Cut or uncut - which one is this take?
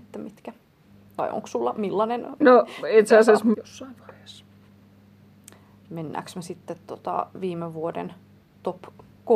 cut